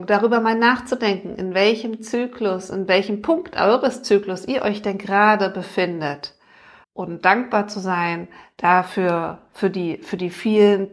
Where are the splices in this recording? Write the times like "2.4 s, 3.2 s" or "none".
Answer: 6.8 s